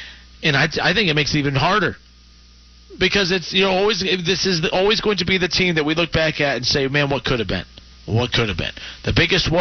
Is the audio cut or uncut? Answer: cut